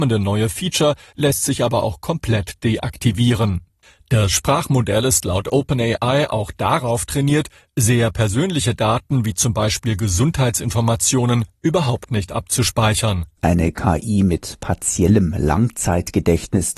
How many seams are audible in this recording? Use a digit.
1